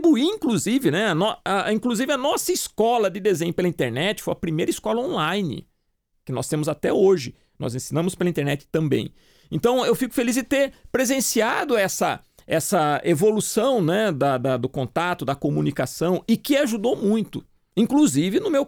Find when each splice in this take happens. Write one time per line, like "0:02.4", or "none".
none